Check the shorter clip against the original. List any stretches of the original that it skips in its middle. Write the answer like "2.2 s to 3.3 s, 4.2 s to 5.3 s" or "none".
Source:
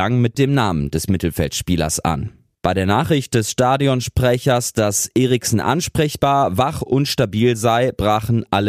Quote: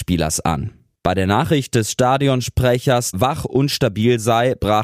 4.7 s to 6.5 s